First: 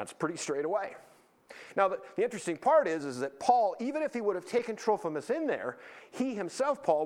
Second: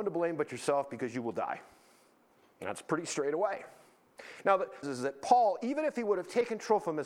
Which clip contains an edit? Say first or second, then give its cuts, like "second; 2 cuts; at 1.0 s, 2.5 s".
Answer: second; 1 cut; at 4.8 s